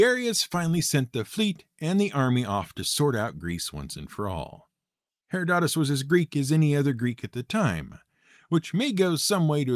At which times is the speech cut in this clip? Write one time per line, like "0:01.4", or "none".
0:05.1